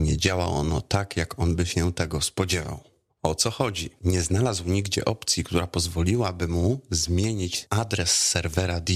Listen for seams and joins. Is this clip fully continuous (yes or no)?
yes